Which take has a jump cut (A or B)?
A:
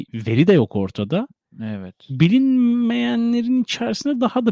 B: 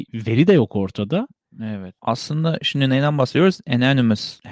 B